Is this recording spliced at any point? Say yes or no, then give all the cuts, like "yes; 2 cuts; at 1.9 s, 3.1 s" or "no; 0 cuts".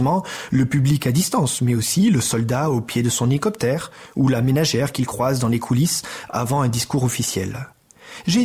no; 0 cuts